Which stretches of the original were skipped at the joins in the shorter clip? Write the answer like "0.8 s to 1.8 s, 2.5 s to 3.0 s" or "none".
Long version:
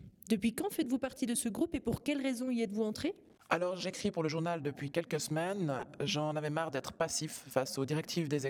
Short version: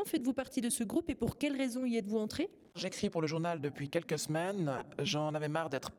3.4 s to 3.8 s

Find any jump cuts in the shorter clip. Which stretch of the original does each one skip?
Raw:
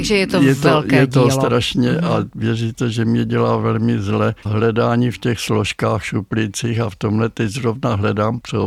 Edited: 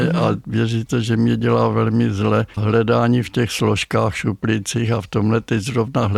none

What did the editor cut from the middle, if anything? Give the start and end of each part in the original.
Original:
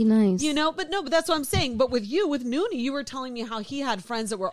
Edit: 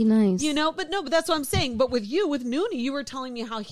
none

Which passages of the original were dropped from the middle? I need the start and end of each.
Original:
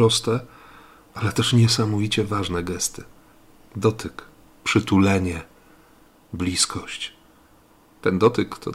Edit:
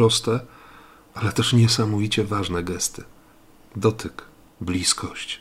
4.5 s to 6.2 s

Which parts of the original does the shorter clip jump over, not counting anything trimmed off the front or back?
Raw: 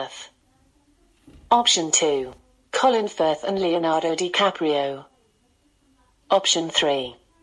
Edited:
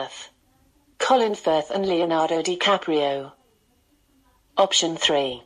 0.9 s to 2.6 s

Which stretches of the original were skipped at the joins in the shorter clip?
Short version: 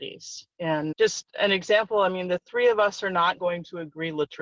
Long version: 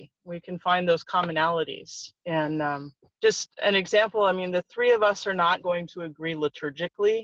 2.6 s to 3.1 s

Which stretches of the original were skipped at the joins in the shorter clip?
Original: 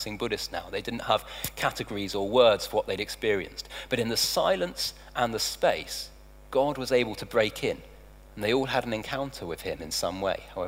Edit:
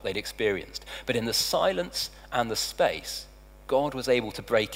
none

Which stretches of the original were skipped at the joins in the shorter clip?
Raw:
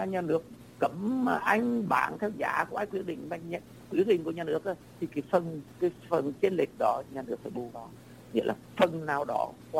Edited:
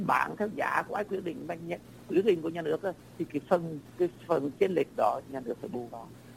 none

